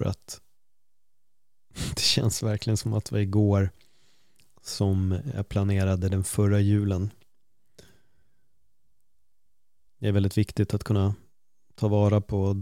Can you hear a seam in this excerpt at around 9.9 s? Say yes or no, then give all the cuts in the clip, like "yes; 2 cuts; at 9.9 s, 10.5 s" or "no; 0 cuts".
yes; 1 cut; at 9.9 s